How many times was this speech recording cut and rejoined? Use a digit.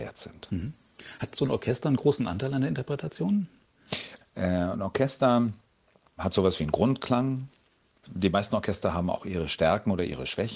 1